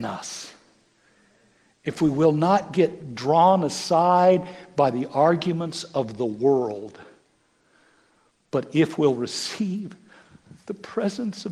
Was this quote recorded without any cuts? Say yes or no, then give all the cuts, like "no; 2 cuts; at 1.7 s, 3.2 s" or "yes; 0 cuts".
yes; 0 cuts